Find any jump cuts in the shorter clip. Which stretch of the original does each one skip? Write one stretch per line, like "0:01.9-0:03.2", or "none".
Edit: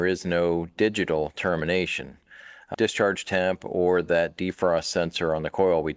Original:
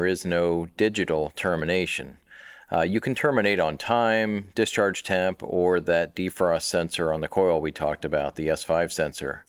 0:02.7-0:04.5